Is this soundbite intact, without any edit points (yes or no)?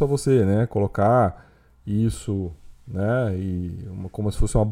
yes